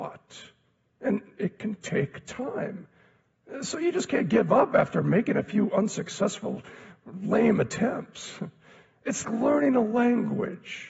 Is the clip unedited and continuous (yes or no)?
no